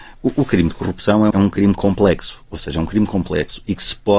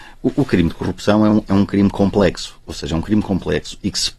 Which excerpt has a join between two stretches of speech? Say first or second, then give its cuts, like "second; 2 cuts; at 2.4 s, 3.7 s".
first; 1 cut; at 1.3 s